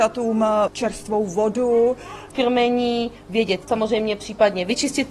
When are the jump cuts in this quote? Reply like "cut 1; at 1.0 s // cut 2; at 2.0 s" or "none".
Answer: cut 1; at 2.3 s // cut 2; at 3.6 s